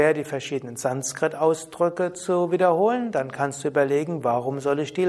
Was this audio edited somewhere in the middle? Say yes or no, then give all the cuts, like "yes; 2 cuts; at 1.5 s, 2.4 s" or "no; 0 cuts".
no; 0 cuts